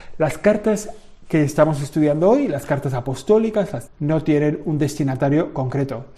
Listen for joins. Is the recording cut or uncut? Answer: cut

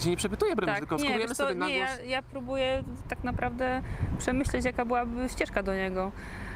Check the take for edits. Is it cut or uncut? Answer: cut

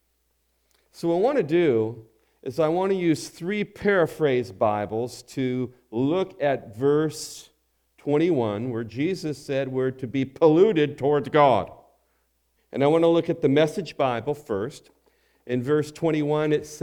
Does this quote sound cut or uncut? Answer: cut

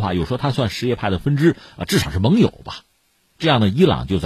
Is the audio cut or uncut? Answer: uncut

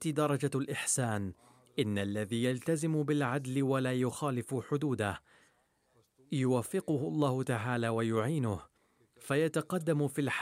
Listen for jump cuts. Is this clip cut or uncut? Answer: uncut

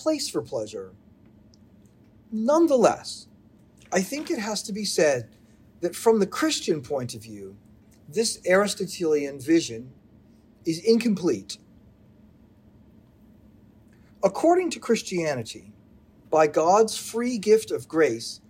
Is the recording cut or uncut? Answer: cut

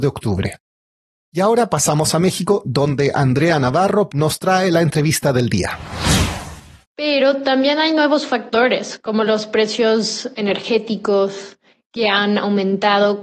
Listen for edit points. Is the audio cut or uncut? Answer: cut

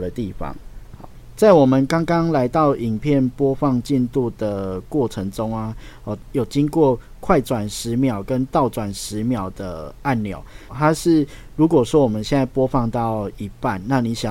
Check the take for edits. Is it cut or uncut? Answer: cut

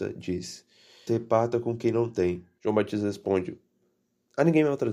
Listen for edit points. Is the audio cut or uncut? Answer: cut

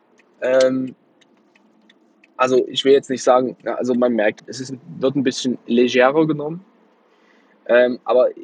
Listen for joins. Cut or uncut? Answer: cut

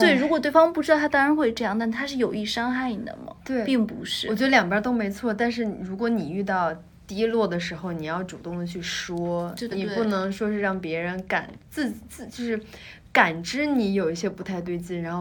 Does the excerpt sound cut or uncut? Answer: cut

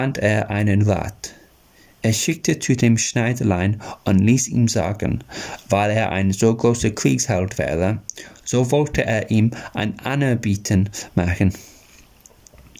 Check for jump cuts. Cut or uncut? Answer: uncut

